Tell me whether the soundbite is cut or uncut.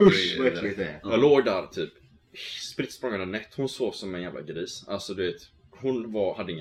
uncut